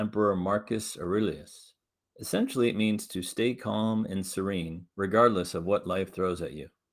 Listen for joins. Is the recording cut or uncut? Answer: cut